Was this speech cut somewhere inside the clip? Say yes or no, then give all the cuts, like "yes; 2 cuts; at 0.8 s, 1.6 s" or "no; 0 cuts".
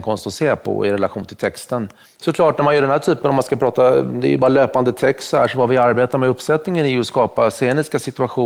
yes; 1 cut; at 2.0 s